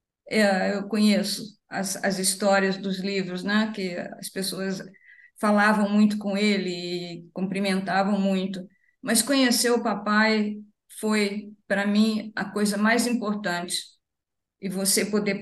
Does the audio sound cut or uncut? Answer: uncut